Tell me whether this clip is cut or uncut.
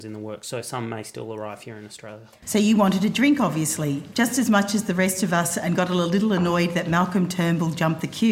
cut